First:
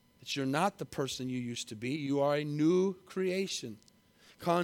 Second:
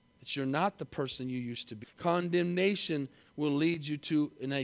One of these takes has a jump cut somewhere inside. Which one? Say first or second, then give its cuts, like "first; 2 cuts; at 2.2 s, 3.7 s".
second; 1 cut; at 1.8 s